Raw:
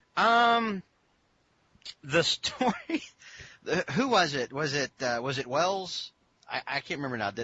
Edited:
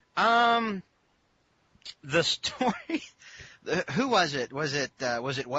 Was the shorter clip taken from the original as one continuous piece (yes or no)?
yes